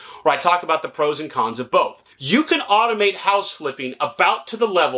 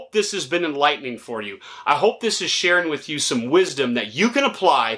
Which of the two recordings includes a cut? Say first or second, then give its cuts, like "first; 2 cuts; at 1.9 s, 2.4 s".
first; 1 cut; at 2.1 s